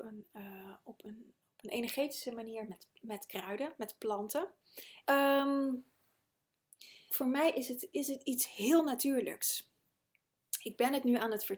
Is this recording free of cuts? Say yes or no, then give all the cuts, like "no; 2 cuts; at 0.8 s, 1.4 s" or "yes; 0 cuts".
no; 2 cuts; at 5.0 s, 7.1 s